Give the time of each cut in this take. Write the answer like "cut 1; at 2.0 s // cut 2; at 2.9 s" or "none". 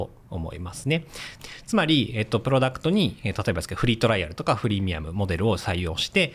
cut 1; at 1.4 s